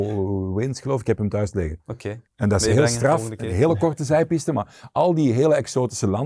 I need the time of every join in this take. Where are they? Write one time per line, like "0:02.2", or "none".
0:02.3